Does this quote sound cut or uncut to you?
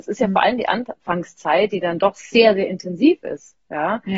uncut